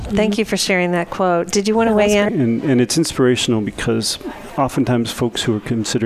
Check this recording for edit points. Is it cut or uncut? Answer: cut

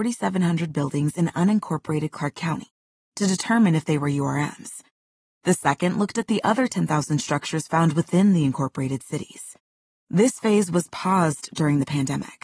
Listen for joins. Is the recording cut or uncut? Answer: uncut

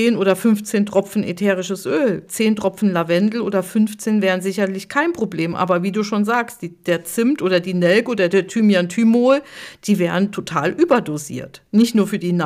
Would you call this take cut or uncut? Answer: uncut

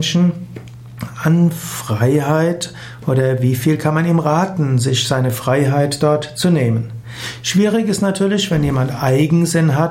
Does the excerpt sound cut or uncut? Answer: uncut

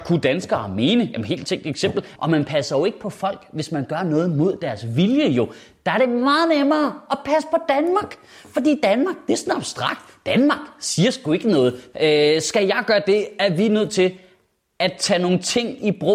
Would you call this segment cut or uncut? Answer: cut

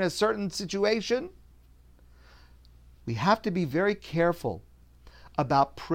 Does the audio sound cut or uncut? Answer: cut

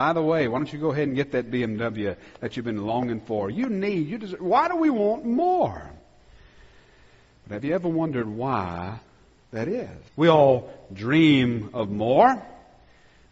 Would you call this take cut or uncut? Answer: cut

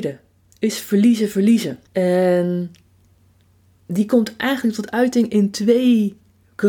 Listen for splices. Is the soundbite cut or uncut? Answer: cut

